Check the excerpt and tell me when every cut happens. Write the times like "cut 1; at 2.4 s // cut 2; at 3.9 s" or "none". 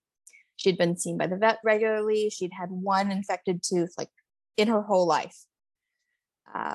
cut 1; at 1.6 s